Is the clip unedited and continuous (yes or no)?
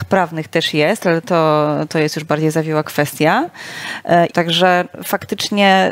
no